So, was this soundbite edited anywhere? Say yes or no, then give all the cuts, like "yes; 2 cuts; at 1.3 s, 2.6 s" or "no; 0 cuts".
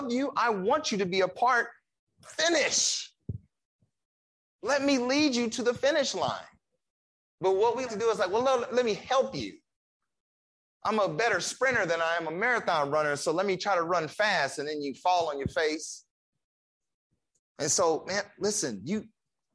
yes; 2 cuts; at 7.9 s, 17.4 s